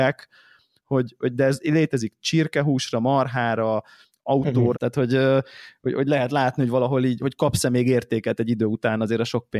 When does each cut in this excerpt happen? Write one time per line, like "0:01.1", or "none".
0:04.7